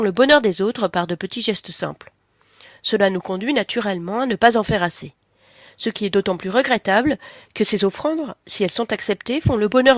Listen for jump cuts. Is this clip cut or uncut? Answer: uncut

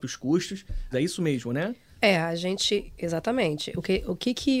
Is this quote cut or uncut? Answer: cut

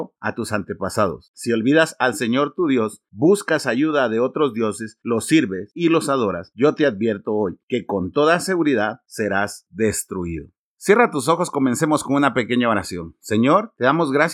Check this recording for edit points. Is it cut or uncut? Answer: uncut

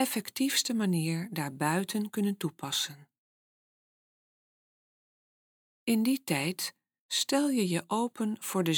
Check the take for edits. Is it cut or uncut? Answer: cut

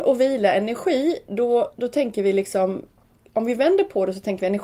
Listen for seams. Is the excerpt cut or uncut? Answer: uncut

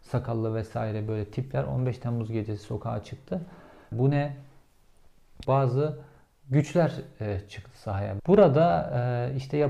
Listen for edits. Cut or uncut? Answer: cut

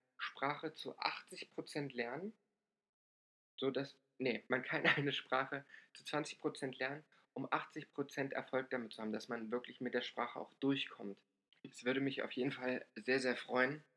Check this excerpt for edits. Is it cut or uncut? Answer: cut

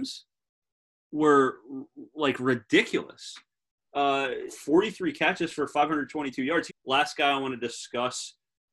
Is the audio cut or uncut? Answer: cut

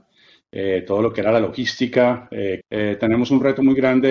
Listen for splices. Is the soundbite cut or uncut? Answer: cut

